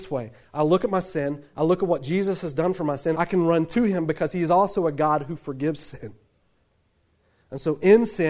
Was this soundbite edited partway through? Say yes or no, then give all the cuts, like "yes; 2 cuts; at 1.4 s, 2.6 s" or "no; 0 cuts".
yes; 1 cut; at 3.1 s